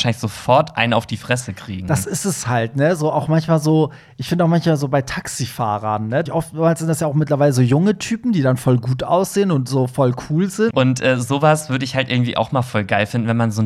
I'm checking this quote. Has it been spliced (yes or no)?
yes